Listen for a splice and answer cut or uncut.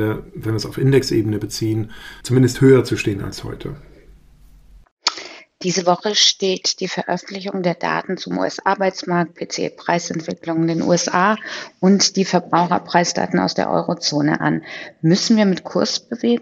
cut